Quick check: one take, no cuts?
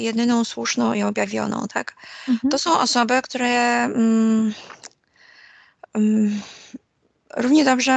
yes; 0 cuts

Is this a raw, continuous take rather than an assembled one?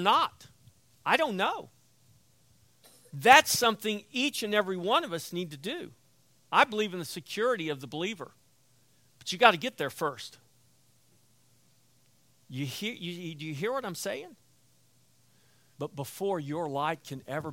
no; 1 cut; at 15.7 s

